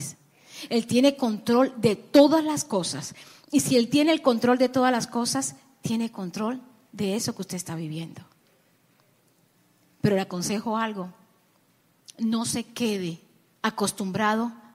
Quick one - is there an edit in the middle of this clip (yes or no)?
no